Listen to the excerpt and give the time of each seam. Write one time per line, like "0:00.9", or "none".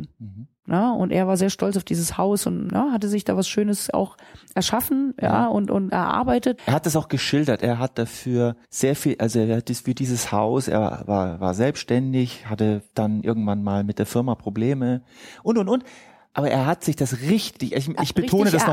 0:08.6